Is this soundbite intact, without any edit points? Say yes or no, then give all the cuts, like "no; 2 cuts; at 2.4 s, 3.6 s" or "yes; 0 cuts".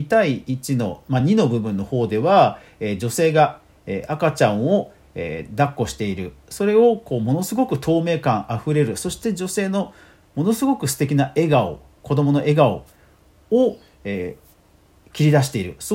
yes; 0 cuts